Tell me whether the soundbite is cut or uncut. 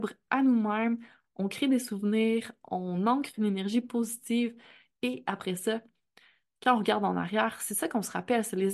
uncut